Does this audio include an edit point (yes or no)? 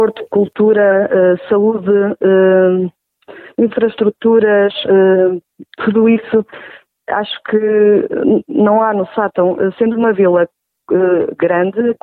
no